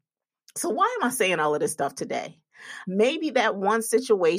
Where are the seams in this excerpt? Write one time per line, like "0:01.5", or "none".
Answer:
0:02.8